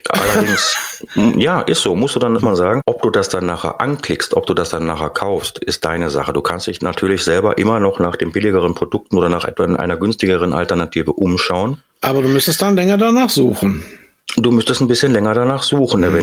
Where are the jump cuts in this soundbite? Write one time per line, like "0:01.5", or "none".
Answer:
none